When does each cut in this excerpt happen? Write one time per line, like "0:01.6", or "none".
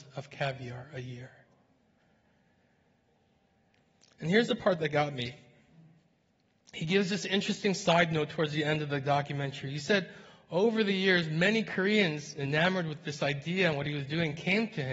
none